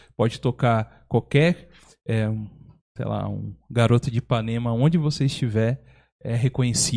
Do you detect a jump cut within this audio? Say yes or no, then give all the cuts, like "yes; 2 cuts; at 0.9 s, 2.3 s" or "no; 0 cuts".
no; 0 cuts